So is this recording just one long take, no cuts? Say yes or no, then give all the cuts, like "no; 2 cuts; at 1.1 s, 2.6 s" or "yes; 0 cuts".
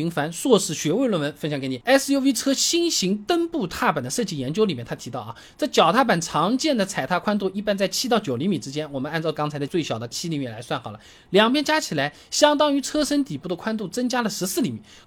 yes; 0 cuts